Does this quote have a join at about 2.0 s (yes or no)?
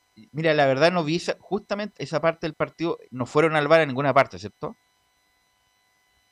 yes